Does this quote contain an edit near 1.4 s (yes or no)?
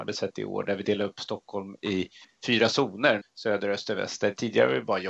no